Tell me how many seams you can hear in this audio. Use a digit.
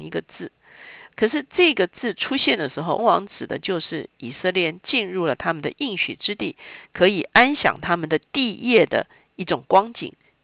1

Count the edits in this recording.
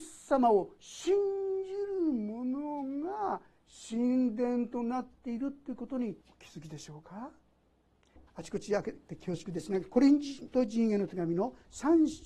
2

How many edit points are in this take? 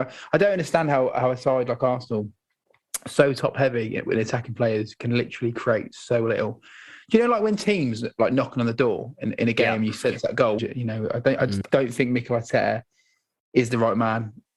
2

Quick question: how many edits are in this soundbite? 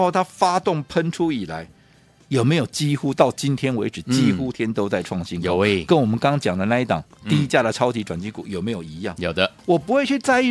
2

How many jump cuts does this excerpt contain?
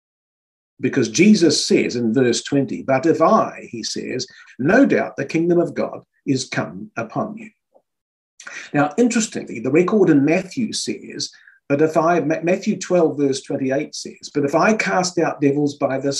1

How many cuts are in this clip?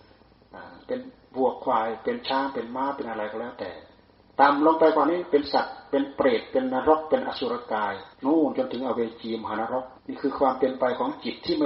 2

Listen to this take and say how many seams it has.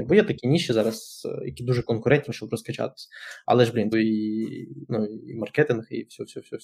2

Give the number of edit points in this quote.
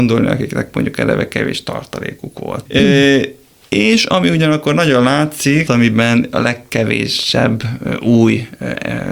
2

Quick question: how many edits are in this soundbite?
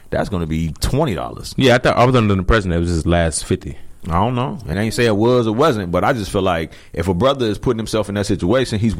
1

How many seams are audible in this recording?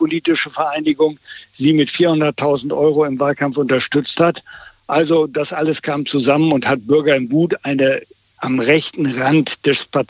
0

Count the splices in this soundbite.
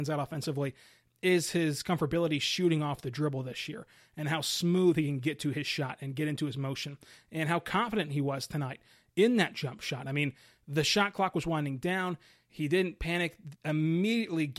1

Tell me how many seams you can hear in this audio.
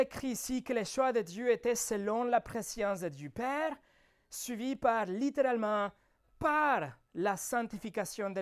0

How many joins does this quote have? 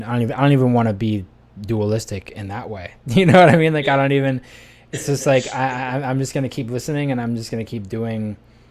0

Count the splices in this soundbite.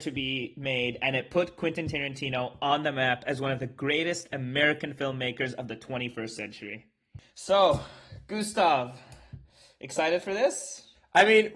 0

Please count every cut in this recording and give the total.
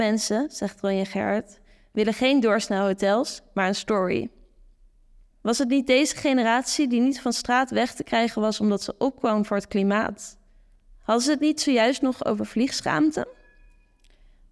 1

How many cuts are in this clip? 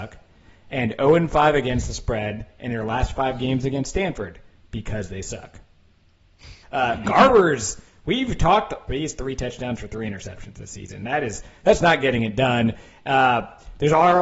2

